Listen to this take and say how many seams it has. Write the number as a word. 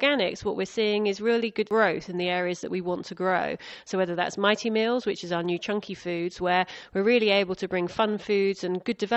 one